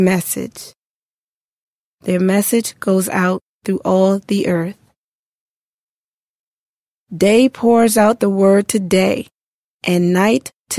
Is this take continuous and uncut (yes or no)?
no